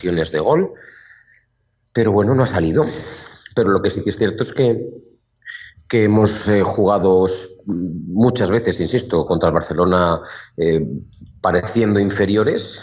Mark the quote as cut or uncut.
cut